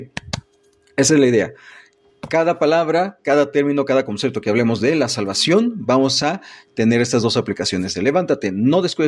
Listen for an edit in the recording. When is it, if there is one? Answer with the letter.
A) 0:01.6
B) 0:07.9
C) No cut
B